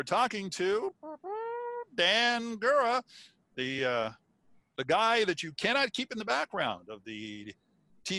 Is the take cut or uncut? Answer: uncut